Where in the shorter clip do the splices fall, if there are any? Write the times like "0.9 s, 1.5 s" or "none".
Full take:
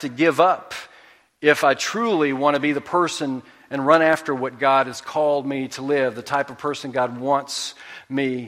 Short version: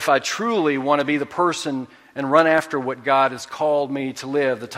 none